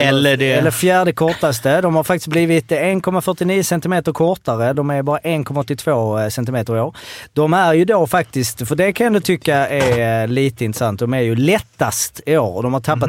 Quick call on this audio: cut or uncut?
uncut